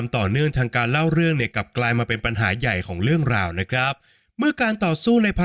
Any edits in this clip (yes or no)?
no